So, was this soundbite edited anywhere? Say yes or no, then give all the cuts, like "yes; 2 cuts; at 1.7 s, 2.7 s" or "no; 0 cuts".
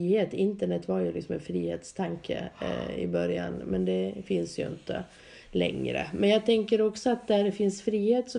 no; 0 cuts